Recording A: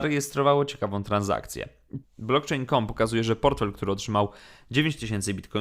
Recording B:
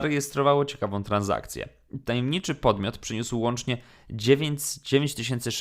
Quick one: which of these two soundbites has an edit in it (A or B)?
A